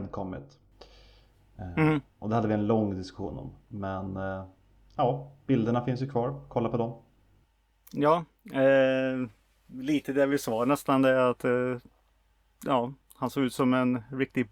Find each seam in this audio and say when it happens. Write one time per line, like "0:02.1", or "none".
none